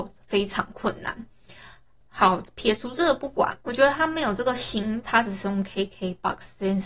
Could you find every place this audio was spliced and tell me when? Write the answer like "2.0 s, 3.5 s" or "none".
3.6 s, 5.0 s